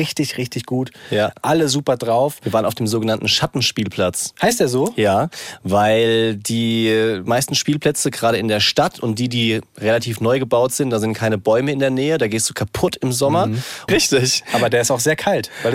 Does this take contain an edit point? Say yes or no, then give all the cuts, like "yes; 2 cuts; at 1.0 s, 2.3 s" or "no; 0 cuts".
yes; 1 cut; at 13.9 s